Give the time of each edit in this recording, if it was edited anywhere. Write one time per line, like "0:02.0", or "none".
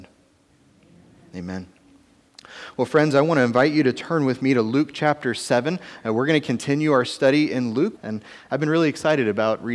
0:08.0